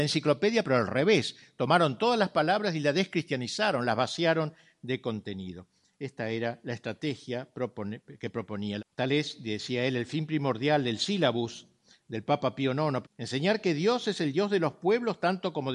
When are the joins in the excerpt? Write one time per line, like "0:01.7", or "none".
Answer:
0:08.8
0:13.0